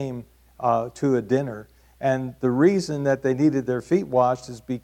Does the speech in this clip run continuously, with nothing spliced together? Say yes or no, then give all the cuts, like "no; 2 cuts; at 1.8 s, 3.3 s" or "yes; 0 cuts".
yes; 0 cuts